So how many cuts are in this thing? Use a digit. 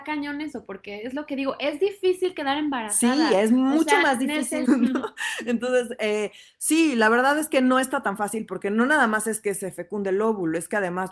1